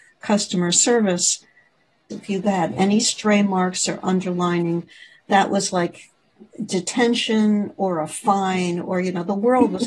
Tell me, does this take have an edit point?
yes; 2 cuts; at 2.1 s, 6.5 s

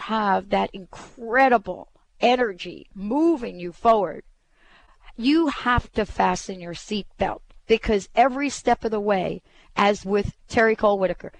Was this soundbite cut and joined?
no; 0 cuts

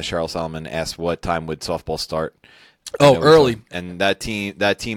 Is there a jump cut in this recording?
yes; 1 cut; at 3.7 s

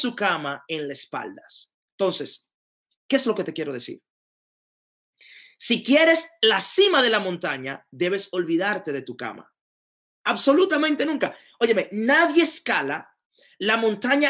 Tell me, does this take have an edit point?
yes; 2 cuts; at 1.7 s, 10.1 s

